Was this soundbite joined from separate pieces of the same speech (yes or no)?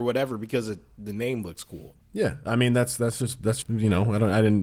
yes